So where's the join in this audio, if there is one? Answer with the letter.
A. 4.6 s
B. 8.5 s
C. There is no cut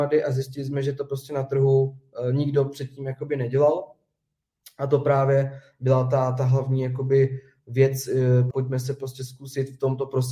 B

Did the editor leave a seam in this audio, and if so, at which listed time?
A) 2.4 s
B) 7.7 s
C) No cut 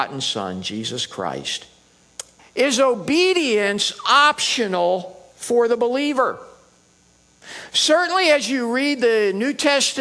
A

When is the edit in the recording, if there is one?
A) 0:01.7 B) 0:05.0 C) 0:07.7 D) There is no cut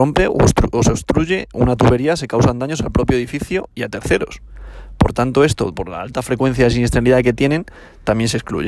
D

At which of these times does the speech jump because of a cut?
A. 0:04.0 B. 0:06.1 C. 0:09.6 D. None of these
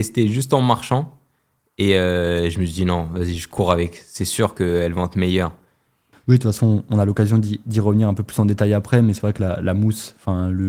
B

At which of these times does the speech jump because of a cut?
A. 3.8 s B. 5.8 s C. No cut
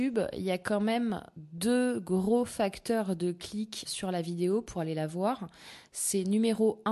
A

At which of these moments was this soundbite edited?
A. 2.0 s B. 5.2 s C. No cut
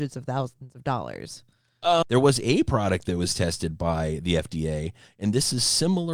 A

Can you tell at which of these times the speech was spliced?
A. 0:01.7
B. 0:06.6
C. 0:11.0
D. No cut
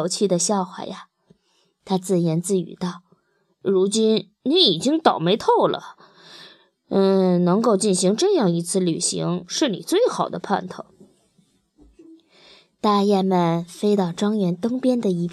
D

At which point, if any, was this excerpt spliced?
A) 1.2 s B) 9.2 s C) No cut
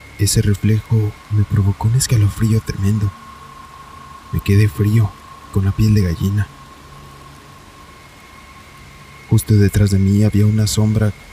A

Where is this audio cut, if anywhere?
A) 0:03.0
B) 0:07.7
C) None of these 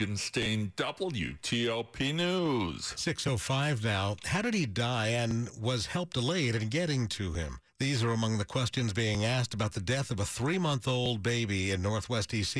B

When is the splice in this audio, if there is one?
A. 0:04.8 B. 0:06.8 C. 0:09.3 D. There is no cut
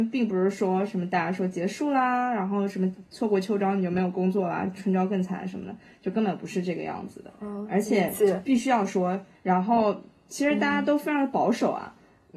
C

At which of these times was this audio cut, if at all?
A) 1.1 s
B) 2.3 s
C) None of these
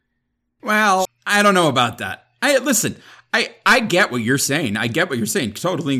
A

